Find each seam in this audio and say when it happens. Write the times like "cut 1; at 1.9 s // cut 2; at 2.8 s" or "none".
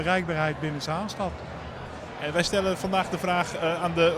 none